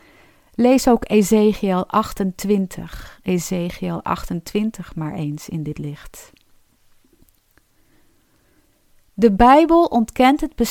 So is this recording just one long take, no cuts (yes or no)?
yes